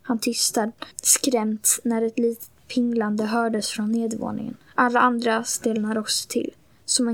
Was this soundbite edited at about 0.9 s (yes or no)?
yes